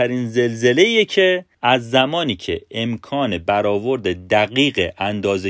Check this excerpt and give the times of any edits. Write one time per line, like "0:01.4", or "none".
0:01.5

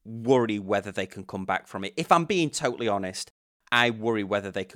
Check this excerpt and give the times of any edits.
none

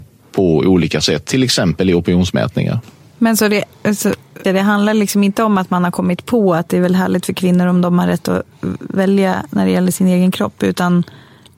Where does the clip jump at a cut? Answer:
0:04.4

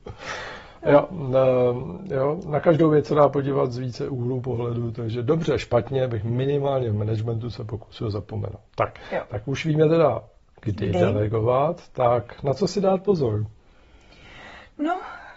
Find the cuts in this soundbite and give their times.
none

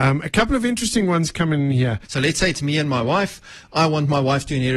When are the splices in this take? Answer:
0:02.0

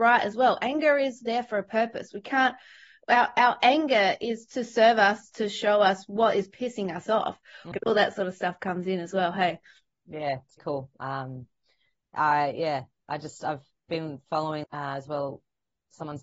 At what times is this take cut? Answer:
0:07.7
0:10.6
0:14.6

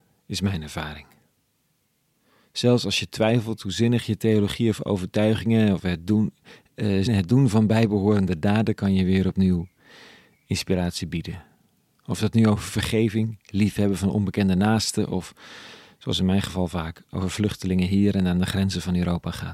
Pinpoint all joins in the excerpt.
0:07.1

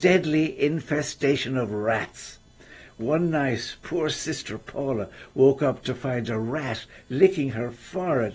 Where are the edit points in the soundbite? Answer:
none

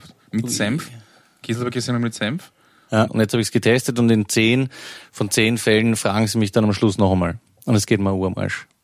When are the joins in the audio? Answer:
0:03.1

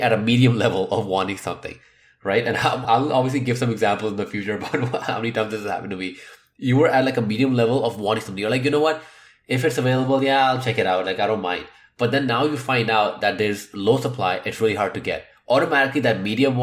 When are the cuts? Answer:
0:02.8

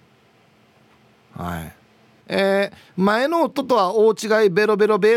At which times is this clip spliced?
0:02.2

